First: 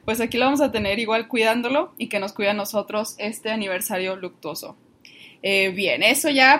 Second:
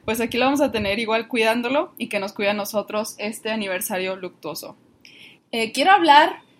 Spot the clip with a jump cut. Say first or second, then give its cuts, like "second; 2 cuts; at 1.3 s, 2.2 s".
second; 1 cut; at 5.4 s